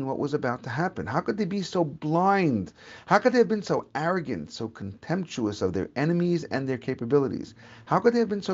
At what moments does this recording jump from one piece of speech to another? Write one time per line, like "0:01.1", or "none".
none